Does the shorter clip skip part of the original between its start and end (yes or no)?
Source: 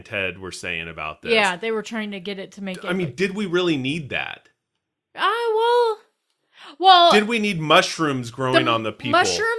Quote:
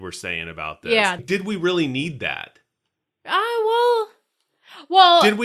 yes